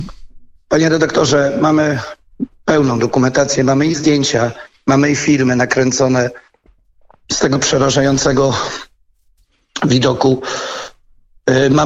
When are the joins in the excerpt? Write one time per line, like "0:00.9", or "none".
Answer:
none

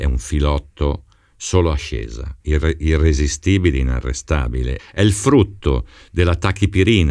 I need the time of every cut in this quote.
0:02.4
0:04.8

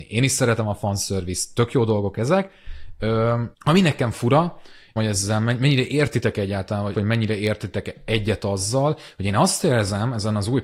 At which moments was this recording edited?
0:03.5
0:05.0
0:06.9

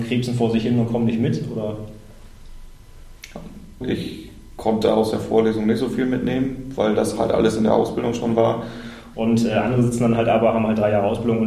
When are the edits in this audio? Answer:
0:03.8
0:09.1

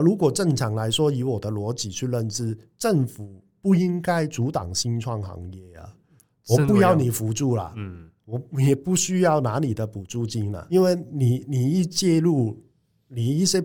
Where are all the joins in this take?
0:10.7

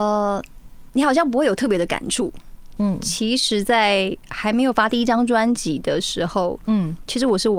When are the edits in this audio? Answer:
0:02.8
0:06.6

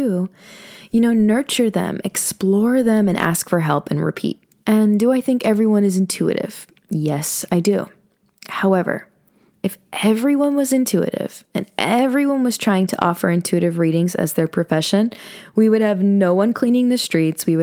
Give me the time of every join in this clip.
0:04.6

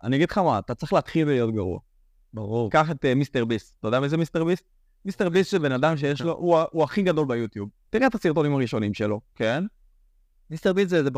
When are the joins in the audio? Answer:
0:07.8
0:09.3

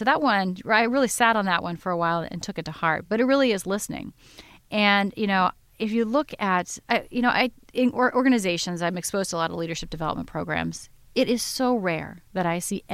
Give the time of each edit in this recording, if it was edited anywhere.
none

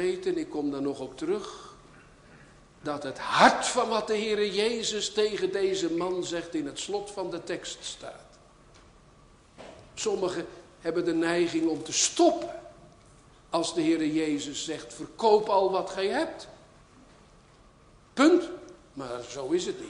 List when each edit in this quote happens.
none

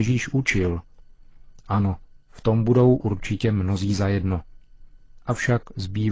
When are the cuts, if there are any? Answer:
none

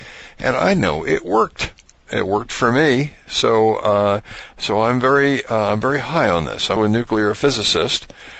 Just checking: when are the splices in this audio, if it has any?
0:06.8

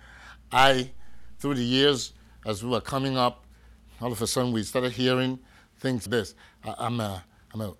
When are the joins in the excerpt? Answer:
0:06.1

